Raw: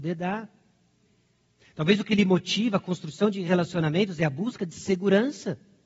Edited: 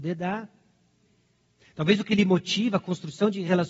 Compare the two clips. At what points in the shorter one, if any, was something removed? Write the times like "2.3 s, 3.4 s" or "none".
none